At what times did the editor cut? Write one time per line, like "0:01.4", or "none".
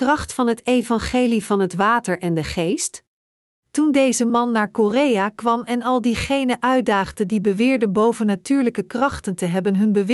0:03.5